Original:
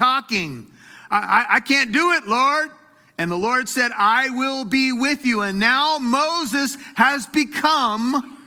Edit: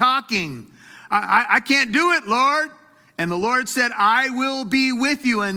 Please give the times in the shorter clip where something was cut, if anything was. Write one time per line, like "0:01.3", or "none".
none